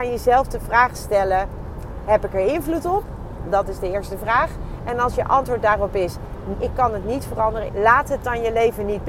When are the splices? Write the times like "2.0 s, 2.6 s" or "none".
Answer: 6.5 s, 7.7 s